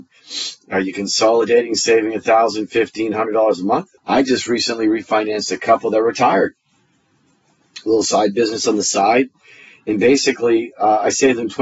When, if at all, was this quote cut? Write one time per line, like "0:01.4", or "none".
0:04.0